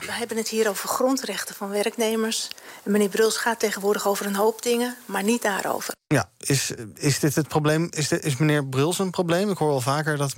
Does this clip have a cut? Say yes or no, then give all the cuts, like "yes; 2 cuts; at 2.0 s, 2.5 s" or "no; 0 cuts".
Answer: no; 0 cuts